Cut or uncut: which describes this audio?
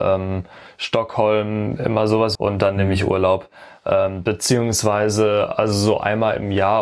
cut